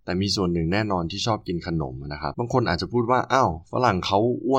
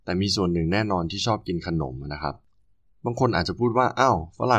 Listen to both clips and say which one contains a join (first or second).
first